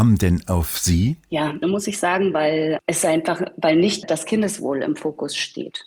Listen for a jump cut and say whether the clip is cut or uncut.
cut